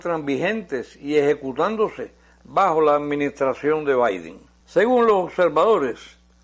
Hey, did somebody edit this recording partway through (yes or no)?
yes